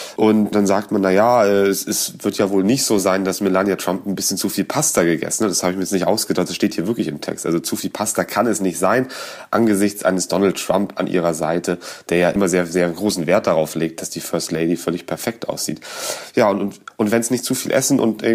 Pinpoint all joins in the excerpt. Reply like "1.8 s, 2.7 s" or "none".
none

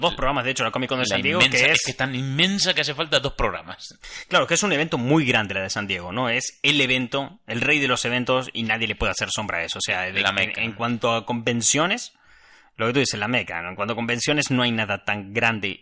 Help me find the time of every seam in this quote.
none

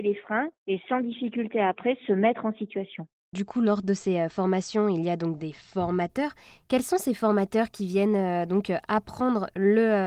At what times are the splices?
none

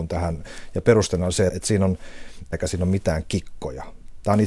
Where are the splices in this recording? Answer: 1.5 s, 2.5 s

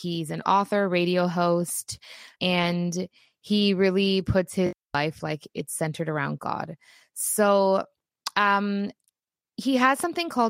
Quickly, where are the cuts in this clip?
2.4 s

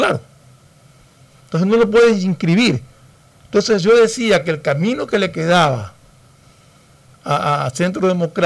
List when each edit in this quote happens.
none

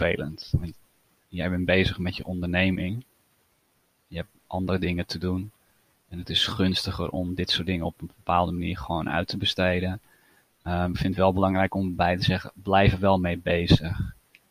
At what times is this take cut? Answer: none

